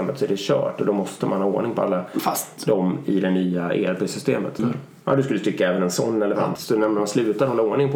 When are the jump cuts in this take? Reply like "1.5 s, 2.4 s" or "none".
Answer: 4.6 s, 6.6 s